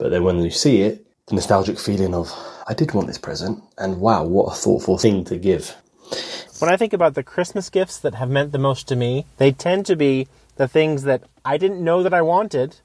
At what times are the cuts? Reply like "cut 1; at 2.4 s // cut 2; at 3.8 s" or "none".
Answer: cut 1; at 2.6 s // cut 2; at 6.5 s // cut 3; at 9.3 s